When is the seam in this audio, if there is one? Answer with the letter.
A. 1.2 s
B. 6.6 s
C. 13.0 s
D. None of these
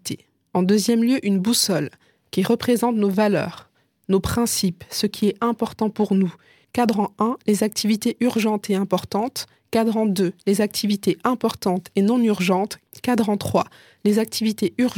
B